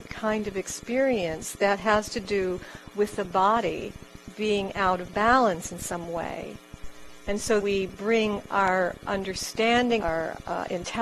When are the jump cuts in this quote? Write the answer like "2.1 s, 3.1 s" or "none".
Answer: 7.6 s, 10.0 s